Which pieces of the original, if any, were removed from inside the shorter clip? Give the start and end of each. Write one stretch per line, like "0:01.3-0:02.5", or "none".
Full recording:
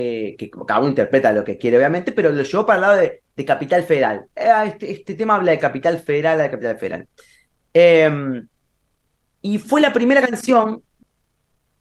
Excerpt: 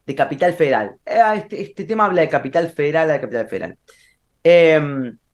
none

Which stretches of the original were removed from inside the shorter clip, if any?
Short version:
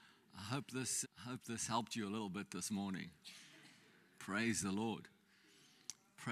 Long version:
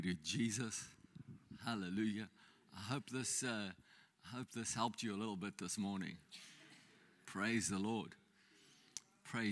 0:03.4-0:04.1

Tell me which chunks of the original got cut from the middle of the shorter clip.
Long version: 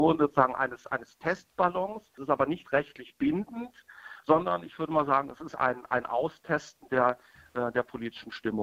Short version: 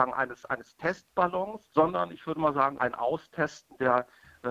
0:02.1-0:04.2
0:05.3-0:05.9

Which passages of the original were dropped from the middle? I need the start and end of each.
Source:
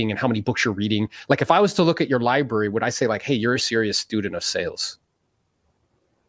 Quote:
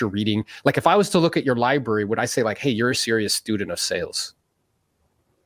none

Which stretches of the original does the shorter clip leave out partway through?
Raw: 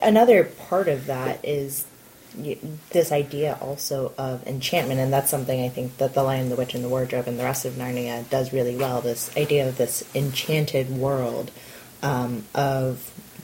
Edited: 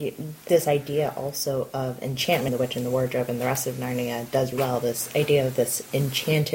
0:04.9-0:06.5
0:08.5-0:08.7

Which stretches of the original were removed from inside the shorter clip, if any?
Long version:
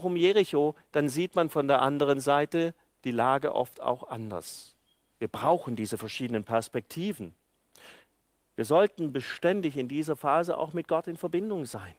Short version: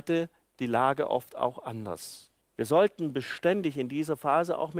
0:04.9-0:08.4

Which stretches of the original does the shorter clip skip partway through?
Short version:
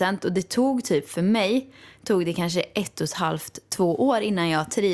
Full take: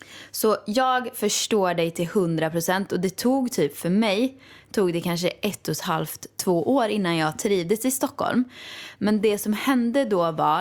none

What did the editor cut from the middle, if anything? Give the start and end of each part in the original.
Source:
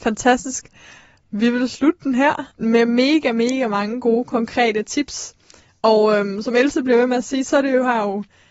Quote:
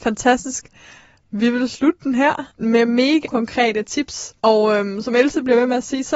0:03.2-0:04.2
0:05.4-0:05.8

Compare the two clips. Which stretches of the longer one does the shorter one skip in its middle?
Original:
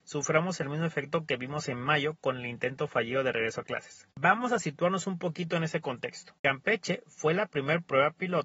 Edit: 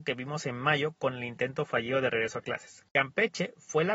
0:04.1-0:06.4

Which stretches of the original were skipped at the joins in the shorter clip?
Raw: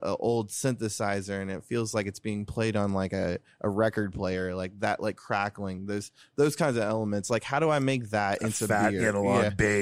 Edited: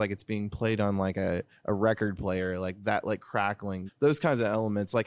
0:05.8-0:06.2

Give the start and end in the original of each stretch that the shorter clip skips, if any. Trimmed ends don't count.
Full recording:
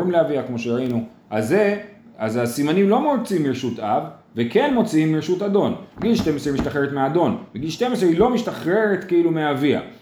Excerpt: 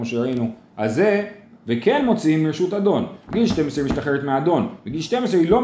0:02.1-0:04.2

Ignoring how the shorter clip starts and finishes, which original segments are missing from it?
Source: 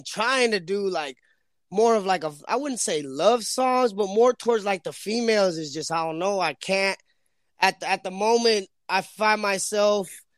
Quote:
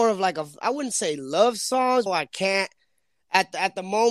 0:03.9-0:06.3

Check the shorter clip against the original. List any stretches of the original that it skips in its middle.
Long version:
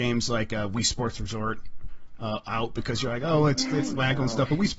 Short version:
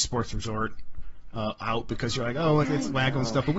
0:03.5-0:03.7

